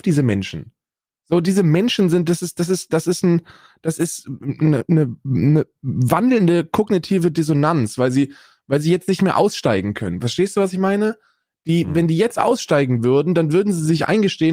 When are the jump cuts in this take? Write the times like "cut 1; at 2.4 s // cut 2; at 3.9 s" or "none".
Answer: cut 1; at 4.9 s